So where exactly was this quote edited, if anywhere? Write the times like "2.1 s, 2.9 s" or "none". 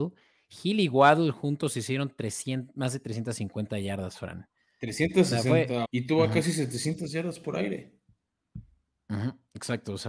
5.8 s